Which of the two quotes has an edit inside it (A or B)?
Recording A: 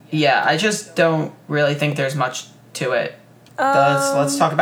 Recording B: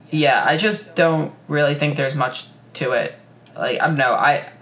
A